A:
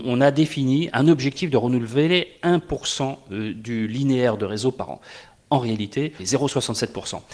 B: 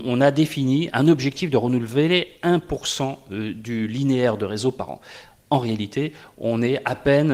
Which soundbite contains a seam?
A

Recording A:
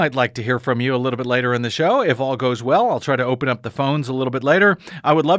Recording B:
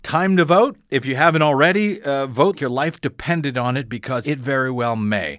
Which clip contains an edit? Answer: B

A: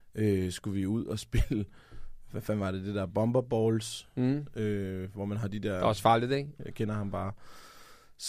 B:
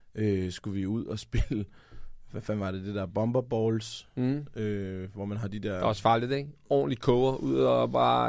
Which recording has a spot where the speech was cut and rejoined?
A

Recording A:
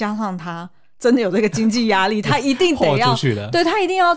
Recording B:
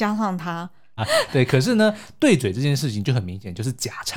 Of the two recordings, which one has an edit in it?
B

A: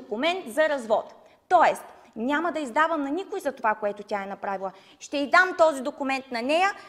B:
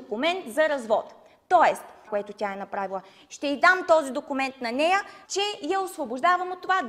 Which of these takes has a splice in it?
B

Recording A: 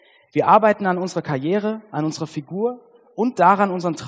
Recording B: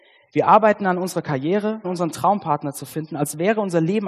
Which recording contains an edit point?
B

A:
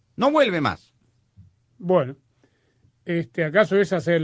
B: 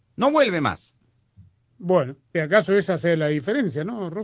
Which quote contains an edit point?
B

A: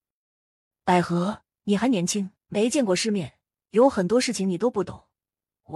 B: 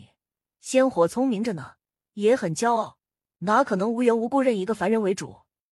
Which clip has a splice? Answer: A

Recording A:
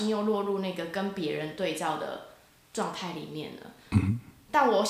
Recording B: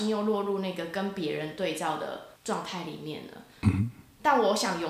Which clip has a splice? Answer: B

